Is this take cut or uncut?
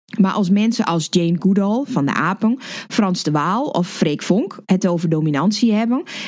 uncut